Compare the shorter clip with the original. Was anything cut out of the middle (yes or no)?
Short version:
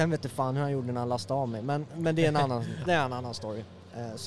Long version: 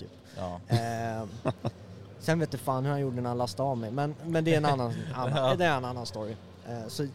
yes